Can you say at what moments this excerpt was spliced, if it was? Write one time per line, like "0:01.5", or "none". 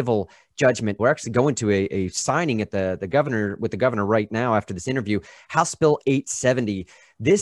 0:01.0